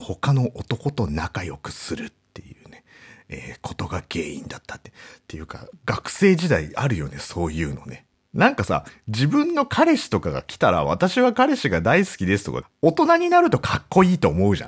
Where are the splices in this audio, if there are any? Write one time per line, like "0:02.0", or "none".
0:05.7
0:08.1
0:12.6